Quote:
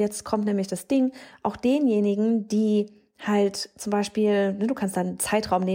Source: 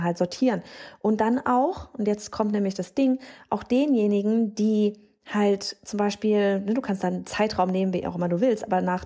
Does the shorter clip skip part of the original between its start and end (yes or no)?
no